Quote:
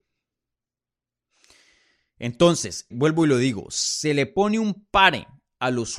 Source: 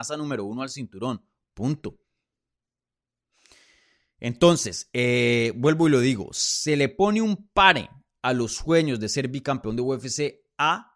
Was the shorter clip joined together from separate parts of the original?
yes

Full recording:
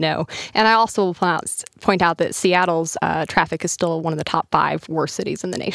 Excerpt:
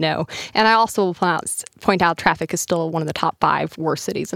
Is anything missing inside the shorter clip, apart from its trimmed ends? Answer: yes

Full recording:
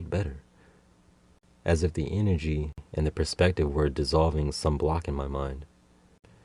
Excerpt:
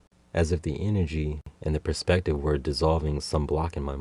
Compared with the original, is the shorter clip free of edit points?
yes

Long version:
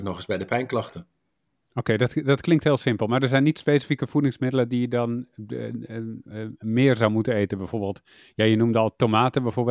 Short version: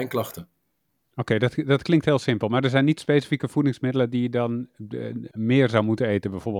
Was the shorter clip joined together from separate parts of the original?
yes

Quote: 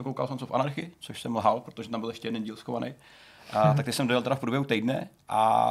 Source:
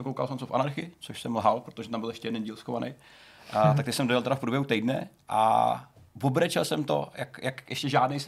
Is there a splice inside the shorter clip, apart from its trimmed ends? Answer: no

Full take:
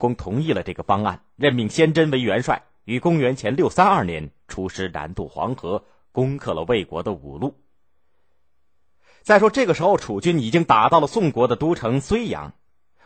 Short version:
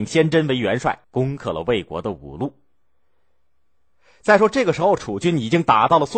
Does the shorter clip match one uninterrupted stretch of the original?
no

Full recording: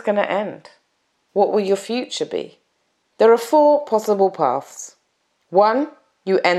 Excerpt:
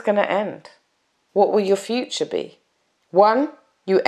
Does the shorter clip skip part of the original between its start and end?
yes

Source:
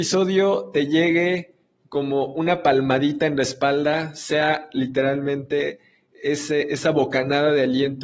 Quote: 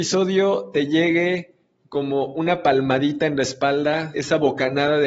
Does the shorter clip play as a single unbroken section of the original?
no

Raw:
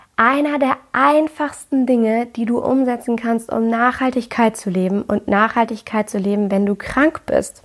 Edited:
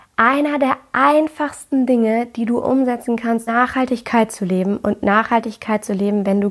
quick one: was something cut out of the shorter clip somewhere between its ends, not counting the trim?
yes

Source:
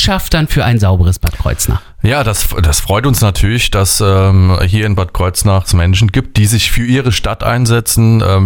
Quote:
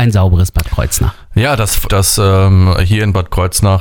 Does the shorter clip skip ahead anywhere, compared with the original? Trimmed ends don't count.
yes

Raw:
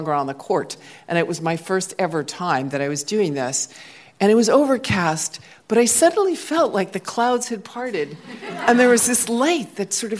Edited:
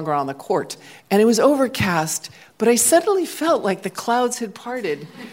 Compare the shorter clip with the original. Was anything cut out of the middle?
yes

